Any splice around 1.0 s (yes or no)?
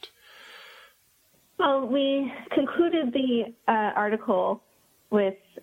yes